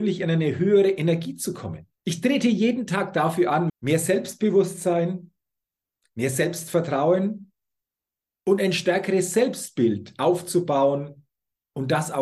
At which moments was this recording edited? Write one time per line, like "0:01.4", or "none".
0:02.0
0:03.7

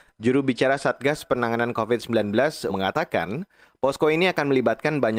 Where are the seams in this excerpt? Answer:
0:02.7

